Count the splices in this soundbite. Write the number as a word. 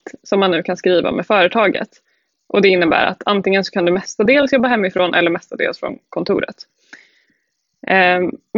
zero